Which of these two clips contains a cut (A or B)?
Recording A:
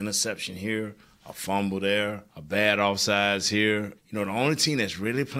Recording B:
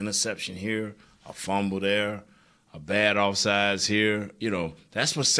A